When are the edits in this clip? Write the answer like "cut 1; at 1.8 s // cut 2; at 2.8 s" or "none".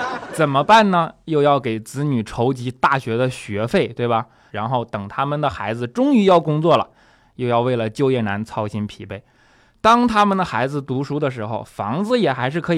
cut 1; at 4.5 s